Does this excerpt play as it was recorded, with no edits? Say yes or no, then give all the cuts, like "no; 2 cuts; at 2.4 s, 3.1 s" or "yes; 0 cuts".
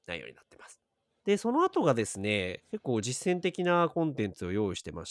no; 1 cut; at 1.2 s